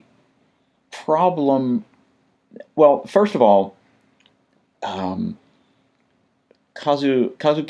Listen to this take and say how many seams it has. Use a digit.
0